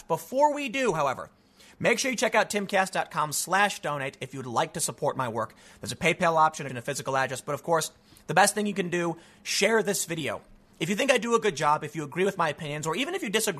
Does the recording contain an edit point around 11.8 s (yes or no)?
no